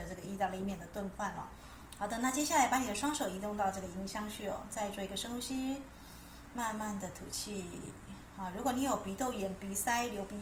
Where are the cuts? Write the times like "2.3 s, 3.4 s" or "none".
2.0 s

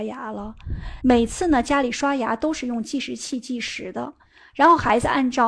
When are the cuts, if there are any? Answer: 1.0 s

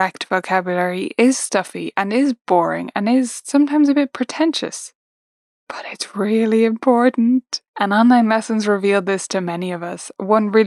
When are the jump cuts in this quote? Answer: 7.7 s

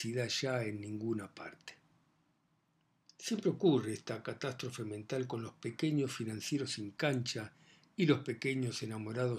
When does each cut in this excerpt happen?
none

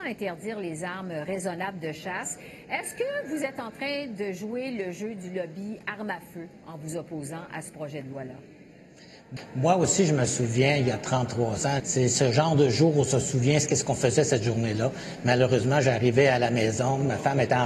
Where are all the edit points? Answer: 11.8 s

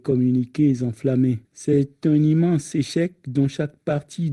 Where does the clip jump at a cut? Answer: 1.4 s

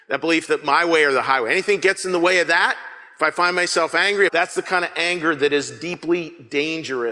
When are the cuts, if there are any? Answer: 4.3 s

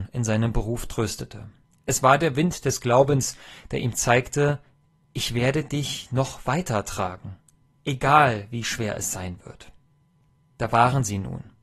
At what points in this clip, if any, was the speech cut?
1.7 s

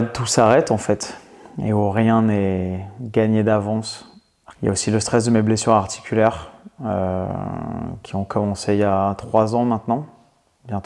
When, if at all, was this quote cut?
4.5 s

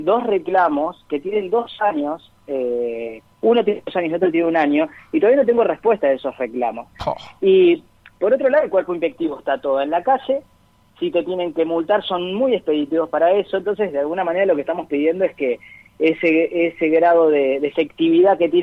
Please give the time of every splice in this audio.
none

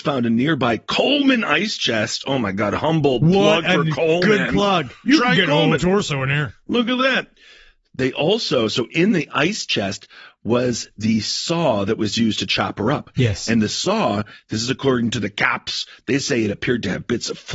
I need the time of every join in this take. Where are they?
5.1 s

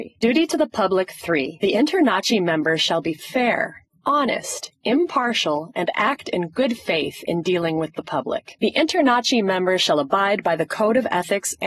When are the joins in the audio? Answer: 8.5 s

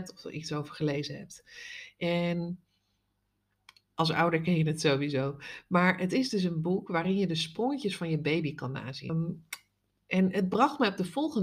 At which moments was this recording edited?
9.1 s

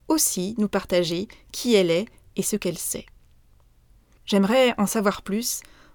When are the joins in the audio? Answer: 4.2 s

